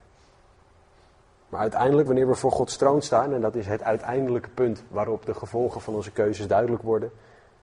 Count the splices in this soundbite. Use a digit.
0